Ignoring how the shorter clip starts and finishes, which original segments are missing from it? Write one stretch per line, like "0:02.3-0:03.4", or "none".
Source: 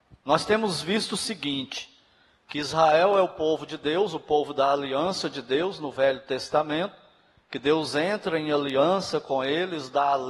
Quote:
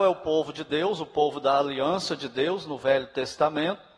none